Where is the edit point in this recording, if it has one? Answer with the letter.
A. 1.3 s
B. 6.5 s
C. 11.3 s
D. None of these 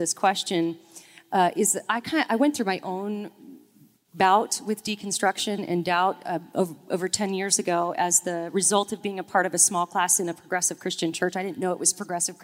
D